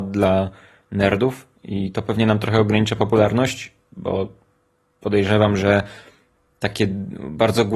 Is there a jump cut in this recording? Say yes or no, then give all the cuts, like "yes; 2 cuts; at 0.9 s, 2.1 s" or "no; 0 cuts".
no; 0 cuts